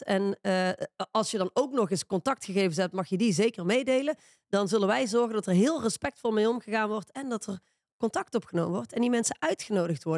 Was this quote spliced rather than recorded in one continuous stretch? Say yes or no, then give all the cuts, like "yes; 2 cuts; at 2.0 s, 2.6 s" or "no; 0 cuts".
no; 0 cuts